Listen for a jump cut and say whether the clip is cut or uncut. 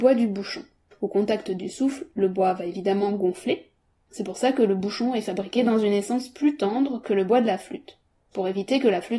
cut